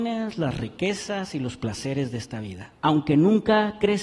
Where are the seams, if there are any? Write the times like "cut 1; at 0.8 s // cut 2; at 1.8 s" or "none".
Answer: cut 1; at 2.8 s